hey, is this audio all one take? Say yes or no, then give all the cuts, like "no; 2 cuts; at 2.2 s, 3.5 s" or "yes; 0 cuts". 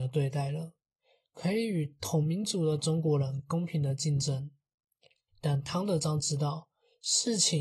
no; 1 cut; at 5.3 s